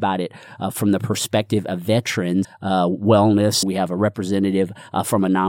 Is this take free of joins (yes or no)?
no